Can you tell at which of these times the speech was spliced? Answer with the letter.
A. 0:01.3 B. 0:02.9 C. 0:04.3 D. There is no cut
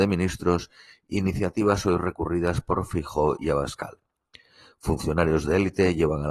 D